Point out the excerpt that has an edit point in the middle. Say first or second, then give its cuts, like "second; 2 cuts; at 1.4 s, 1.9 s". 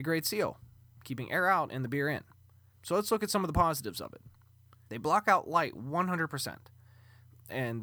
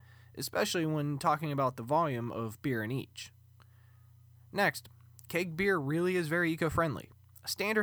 first; 2 cuts; at 2.7 s, 4.8 s